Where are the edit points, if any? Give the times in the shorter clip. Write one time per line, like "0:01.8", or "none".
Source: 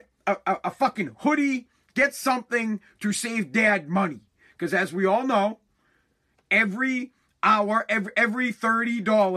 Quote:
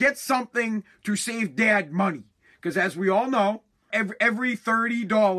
0:03.9